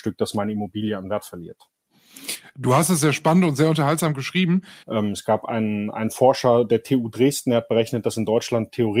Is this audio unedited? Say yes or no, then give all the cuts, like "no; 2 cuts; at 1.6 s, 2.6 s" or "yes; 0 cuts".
no; 1 cut; at 4.8 s